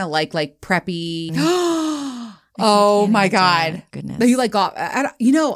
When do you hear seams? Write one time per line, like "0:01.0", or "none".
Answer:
0:01.3
0:03.9